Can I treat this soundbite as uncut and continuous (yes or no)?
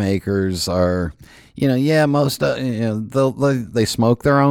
yes